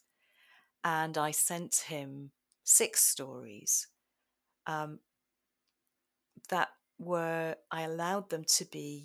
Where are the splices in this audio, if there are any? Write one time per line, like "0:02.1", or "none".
none